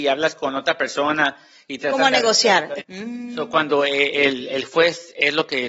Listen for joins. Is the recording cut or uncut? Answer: cut